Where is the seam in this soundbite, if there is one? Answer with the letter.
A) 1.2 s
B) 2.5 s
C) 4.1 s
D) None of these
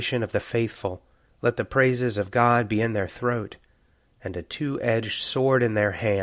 A